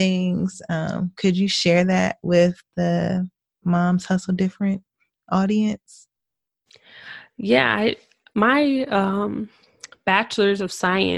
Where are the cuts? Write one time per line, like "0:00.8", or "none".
none